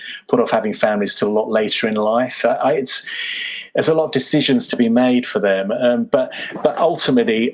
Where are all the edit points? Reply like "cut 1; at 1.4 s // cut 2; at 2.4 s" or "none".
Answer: none